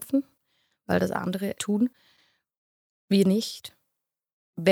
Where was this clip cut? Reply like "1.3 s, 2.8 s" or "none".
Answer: 1.6 s